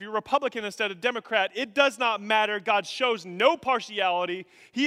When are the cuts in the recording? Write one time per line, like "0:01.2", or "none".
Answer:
none